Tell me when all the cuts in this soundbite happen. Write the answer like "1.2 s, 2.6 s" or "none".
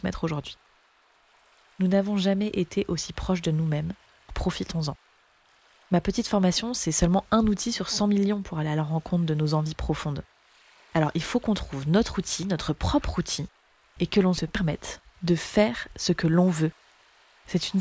4.3 s